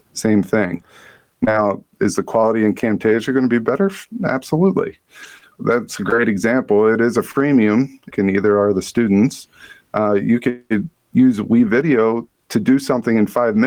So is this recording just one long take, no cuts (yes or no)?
no